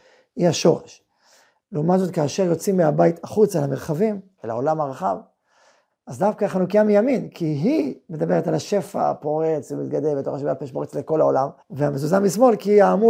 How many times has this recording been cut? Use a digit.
3